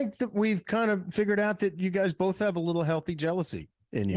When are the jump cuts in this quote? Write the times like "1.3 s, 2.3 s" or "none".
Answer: none